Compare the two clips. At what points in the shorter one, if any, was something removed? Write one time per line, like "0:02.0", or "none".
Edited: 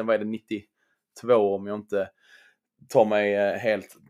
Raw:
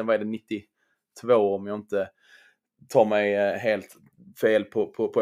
none